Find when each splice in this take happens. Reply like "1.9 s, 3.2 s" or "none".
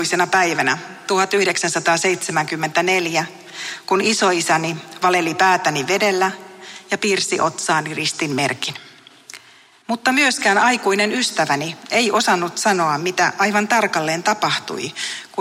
9.8 s